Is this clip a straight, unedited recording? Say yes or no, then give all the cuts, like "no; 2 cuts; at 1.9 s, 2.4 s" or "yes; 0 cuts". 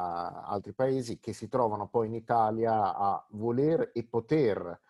yes; 0 cuts